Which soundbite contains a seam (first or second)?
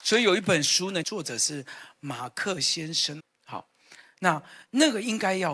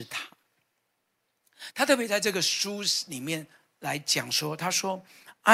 first